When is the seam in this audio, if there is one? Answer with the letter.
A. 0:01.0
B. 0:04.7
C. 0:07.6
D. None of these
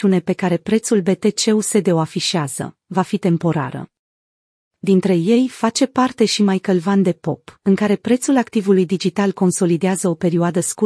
C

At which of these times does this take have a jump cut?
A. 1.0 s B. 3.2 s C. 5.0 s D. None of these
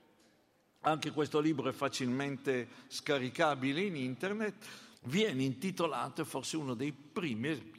C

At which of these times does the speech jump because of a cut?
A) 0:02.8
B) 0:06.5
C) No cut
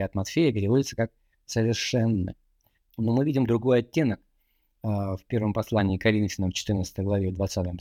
A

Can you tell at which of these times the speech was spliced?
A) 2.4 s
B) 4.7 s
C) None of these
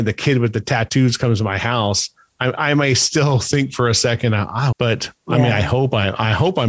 B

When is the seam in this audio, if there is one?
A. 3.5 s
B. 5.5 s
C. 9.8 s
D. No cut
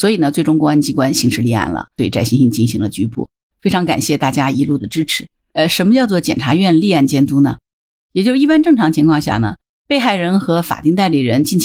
A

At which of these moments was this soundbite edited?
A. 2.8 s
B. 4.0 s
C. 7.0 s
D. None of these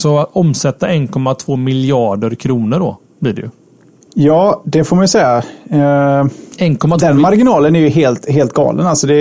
B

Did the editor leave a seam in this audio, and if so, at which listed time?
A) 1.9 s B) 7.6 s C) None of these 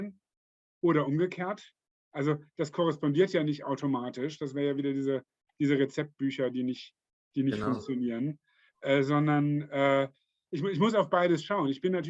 C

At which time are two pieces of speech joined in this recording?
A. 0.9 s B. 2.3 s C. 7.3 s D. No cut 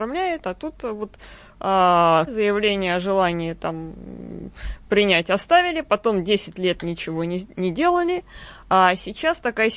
B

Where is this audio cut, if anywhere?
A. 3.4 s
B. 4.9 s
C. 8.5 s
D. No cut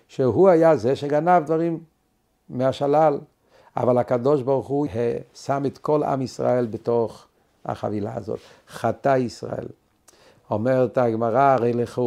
B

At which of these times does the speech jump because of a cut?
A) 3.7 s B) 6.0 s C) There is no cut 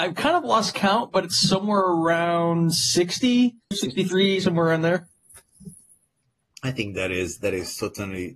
A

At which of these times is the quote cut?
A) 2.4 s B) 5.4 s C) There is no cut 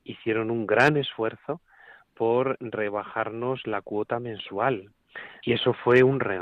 B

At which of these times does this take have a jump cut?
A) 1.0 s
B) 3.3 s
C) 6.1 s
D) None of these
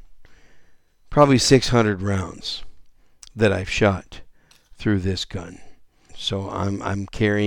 C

